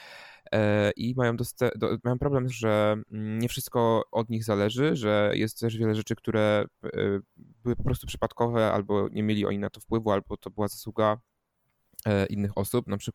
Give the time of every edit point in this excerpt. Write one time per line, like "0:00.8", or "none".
0:02.5